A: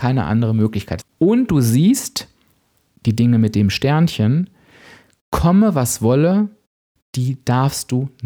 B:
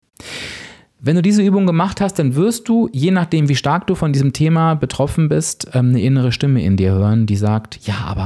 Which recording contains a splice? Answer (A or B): A